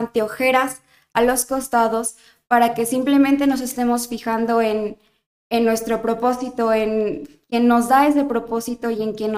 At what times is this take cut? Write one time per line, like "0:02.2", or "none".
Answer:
none

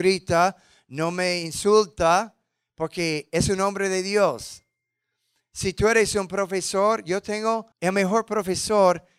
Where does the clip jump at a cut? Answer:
0:07.7

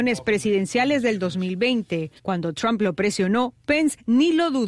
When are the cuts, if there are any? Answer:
0:02.2

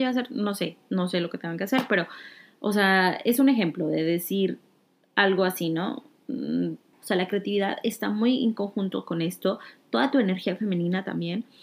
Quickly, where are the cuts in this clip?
0:06.9

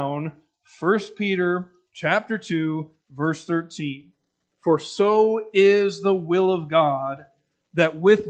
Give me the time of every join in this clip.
0:04.5

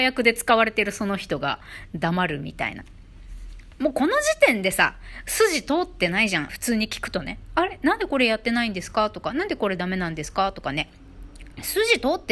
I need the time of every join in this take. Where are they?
0:06.5

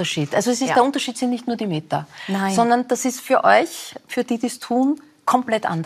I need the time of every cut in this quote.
none

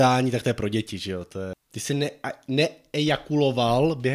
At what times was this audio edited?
0:01.5

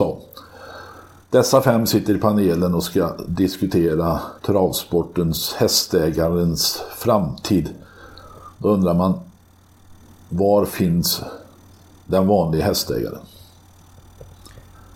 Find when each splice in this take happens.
0:04.4

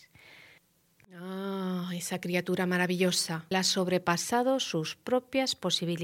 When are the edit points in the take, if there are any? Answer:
0:01.0
0:03.5

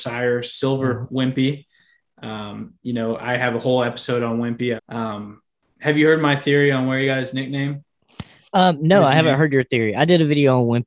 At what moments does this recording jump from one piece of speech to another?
0:04.8

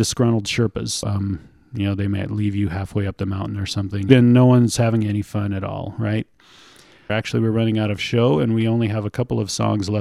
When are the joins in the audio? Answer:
0:01.0
0:04.1
0:07.1

